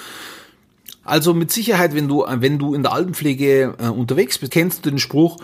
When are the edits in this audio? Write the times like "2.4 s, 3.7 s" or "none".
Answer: 1.0 s, 4.5 s